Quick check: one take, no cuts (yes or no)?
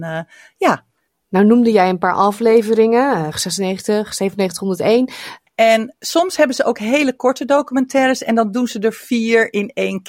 no